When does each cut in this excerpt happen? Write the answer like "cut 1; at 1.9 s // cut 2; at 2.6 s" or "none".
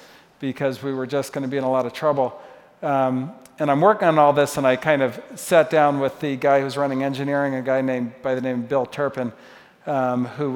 none